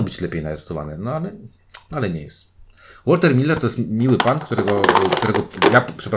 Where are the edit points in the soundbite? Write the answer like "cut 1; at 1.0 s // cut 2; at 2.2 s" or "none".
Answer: none